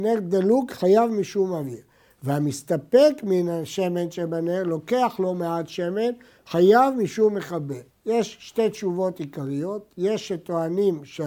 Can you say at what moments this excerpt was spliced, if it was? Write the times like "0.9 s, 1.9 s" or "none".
7.9 s

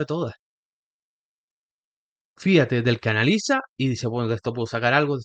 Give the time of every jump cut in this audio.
none

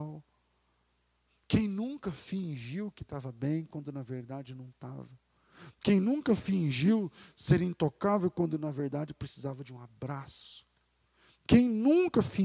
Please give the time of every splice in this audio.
none

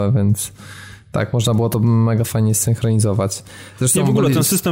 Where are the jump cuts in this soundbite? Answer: none

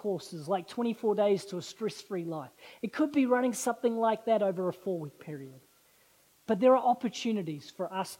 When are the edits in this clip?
none

